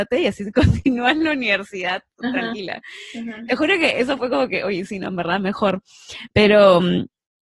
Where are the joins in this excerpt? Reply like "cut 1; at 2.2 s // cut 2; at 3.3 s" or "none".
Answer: none